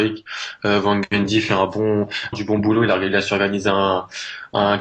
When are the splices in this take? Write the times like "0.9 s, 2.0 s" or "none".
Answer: 2.3 s